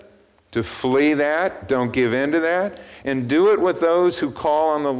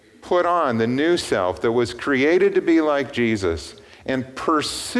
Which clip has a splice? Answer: first; 1 cut; at 3.0 s

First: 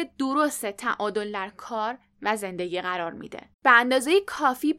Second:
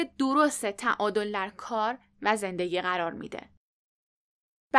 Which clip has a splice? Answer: first; 1 cut; at 3.5 s

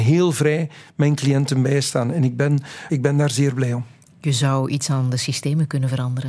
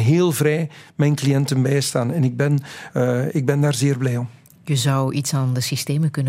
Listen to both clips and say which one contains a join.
first; 1 cut; at 2.9 s

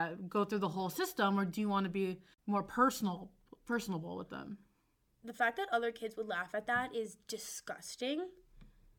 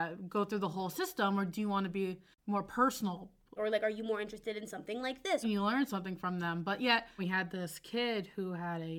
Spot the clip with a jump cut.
second; 3 cuts; at 3.6 s, 5.4 s, 7.2 s

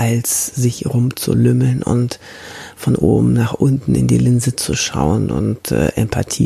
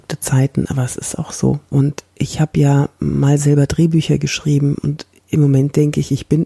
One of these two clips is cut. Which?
second; 1 cut; at 1.7 s

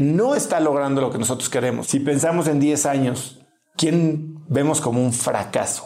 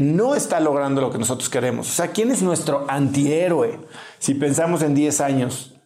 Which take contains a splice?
first; 2 cuts; at 1.8 s, 3.7 s

